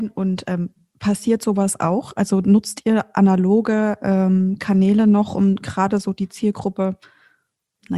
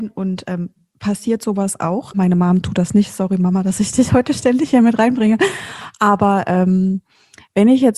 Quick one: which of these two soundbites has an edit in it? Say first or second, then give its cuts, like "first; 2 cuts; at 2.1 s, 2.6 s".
second; 1 cut; at 2.1 s